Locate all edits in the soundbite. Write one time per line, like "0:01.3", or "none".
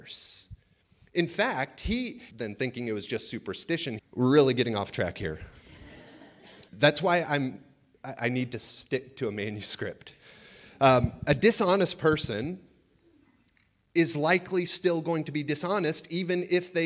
0:02.3
0:04.0
0:06.7